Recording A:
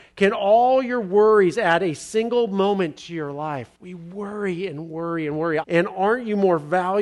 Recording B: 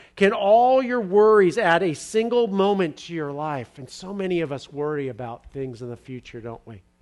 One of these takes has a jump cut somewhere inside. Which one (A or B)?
A